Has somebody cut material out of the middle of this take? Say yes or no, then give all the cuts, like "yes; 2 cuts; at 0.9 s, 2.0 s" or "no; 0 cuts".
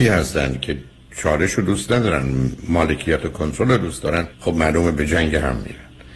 yes; 1 cut; at 4.3 s